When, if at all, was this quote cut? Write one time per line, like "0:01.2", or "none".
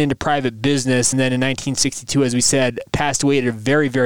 none